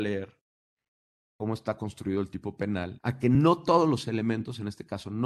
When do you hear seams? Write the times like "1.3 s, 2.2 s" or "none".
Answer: 3.0 s

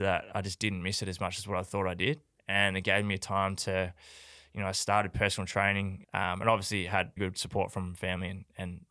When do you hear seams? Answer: 6.0 s, 7.2 s

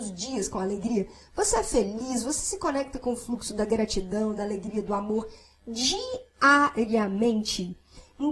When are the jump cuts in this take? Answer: none

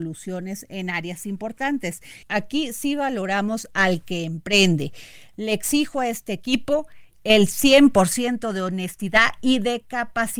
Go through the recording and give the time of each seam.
2.2 s

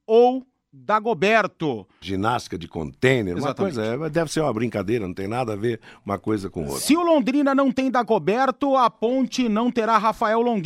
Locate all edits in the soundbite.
2.0 s

